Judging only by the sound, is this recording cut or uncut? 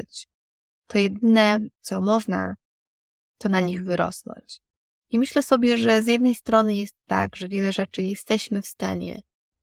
uncut